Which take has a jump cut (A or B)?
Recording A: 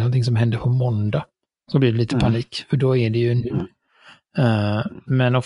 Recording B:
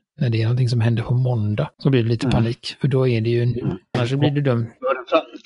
B